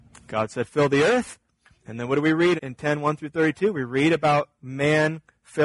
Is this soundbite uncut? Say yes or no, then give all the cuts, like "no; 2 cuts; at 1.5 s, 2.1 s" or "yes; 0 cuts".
no; 1 cut; at 2.6 s